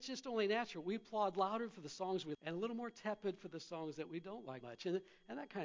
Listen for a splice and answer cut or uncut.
cut